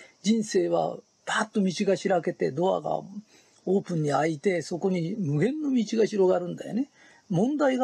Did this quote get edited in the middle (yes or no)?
no